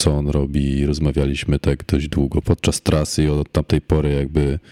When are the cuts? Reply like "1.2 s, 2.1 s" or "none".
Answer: 2.4 s

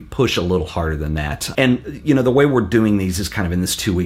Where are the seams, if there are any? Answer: 1.5 s

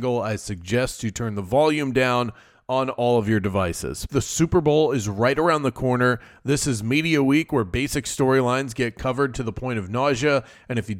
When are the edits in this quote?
4.1 s

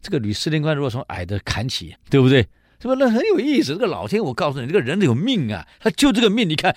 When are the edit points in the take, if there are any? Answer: 1.9 s

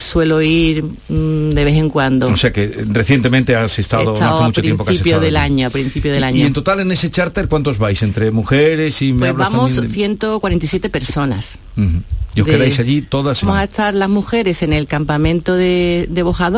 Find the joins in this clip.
13.4 s

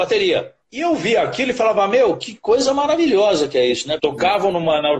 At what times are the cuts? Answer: 4.0 s

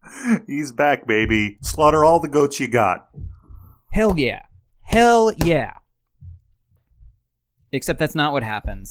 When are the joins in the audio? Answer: none

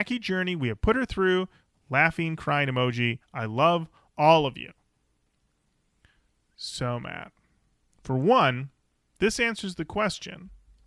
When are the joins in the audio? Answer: none

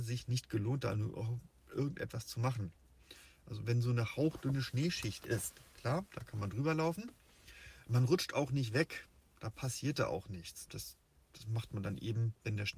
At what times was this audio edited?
10.7 s

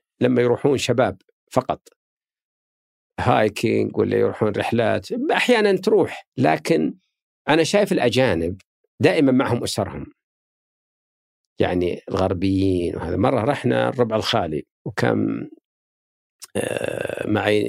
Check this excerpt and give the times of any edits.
6.3 s, 14.7 s

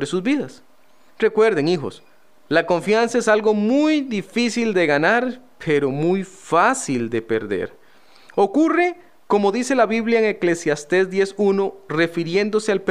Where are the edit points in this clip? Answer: none

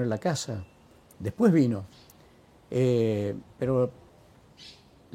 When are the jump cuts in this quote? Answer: none

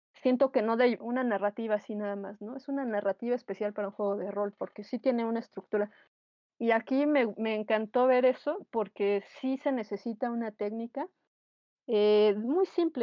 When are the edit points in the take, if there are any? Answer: 1.0 s

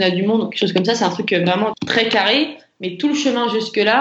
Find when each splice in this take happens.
1.7 s

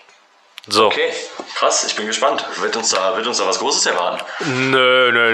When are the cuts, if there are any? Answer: none

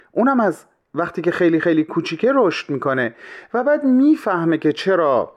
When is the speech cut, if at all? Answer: none

